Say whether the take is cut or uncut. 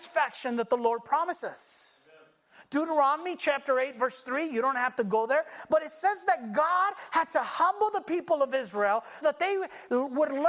cut